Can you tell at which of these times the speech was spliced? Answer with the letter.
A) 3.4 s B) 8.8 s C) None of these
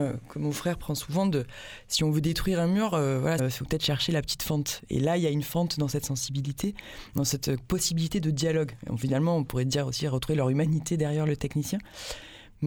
A